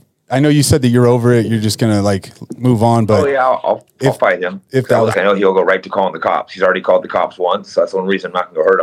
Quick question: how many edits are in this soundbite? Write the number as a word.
one